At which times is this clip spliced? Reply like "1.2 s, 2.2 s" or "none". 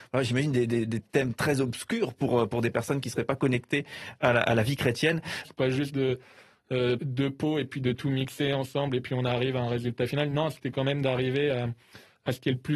5.4 s, 7.0 s